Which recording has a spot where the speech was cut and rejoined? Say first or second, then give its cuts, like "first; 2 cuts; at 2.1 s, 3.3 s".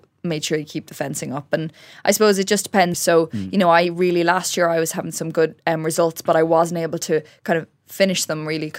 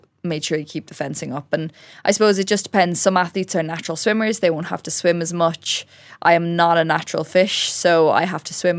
first; 1 cut; at 2.9 s